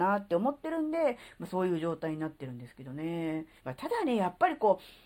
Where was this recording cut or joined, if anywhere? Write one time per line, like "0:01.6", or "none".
0:03.6